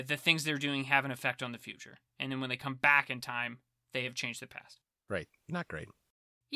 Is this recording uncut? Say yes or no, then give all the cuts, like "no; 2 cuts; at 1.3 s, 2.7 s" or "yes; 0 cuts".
no; 1 cut; at 5.3 s